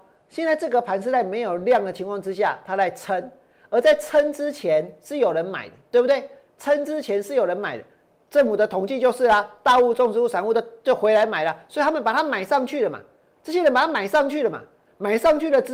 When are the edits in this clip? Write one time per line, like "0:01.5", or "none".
none